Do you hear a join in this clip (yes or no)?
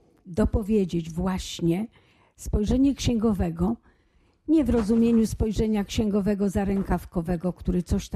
no